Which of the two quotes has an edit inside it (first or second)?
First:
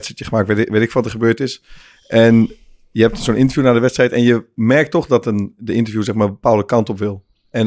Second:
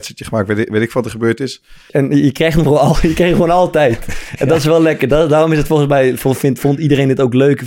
second